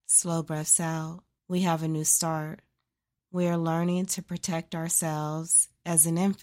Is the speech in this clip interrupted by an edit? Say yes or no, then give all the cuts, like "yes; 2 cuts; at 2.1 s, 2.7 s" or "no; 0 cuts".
yes; 2 cuts; at 1.4 s, 3.2 s